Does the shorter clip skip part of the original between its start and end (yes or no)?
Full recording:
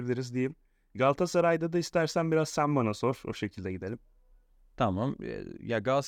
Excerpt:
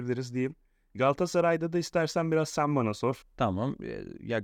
yes